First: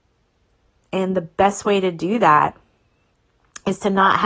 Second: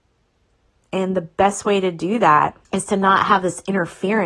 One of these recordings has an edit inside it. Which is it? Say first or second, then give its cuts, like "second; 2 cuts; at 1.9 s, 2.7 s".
second; 1 cut; at 2.7 s